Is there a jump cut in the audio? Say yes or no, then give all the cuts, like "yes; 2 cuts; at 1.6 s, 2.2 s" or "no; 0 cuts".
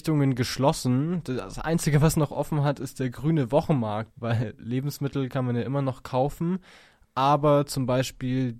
yes; 1 cut; at 4.1 s